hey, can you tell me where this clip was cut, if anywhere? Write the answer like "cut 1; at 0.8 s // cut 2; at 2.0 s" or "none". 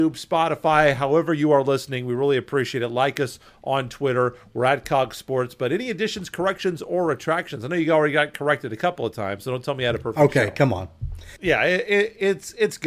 cut 1; at 11.4 s